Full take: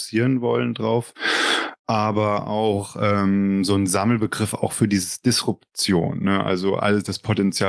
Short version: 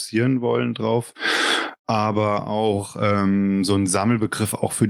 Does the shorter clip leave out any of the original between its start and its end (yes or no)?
no